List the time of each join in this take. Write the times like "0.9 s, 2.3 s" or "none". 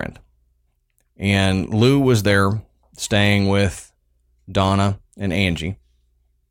none